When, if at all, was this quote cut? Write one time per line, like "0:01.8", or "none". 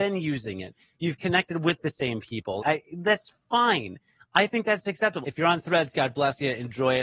0:02.6
0:05.2